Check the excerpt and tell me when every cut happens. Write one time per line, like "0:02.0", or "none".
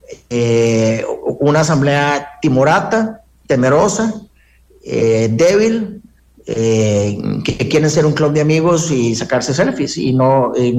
none